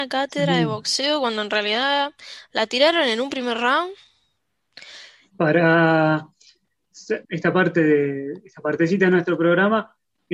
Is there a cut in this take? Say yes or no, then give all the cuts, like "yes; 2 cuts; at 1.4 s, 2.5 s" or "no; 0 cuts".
yes; 2 cuts; at 5.3 s, 7.2 s